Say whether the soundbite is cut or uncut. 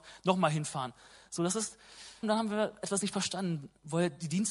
cut